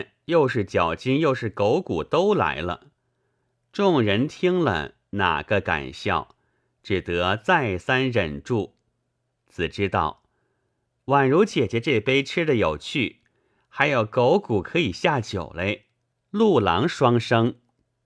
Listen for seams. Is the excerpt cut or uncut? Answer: cut